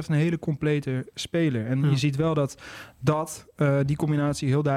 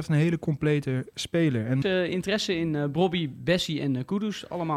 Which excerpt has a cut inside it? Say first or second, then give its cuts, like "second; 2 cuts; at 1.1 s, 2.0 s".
second; 1 cut; at 1.8 s